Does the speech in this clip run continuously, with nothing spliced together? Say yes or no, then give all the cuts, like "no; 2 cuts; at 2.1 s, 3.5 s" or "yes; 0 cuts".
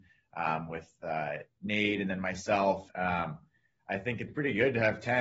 no; 2 cuts; at 2.9 s, 4.3 s